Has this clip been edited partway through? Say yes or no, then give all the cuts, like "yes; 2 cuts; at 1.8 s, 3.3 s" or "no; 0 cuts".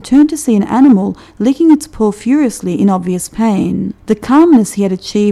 yes; 1 cut; at 4.0 s